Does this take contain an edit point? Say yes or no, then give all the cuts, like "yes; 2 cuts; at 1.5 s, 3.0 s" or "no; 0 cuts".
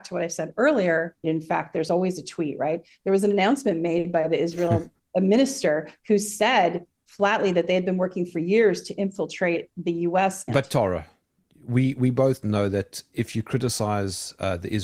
yes; 3 cuts; at 1.2 s, 5.0 s, 10.5 s